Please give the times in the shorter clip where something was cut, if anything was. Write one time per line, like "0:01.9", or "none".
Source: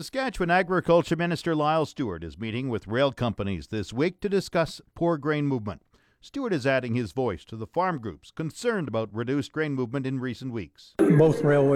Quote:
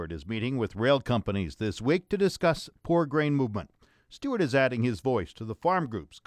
none